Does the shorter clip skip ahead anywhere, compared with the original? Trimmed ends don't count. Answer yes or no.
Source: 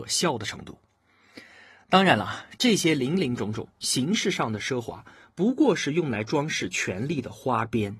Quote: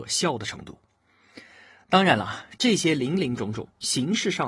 no